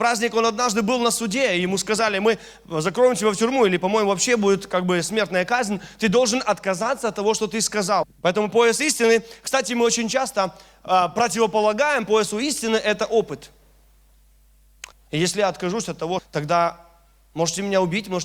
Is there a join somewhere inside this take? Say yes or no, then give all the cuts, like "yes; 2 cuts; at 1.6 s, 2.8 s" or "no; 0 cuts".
yes; 3 cuts; at 8.0 s, 14.9 s, 16.2 s